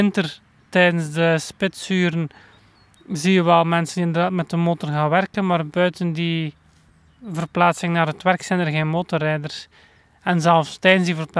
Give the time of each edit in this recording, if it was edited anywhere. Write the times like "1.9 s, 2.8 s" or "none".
none